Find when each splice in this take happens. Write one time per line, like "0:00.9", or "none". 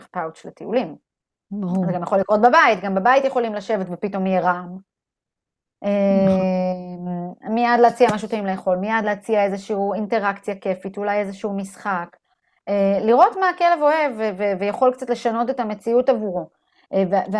none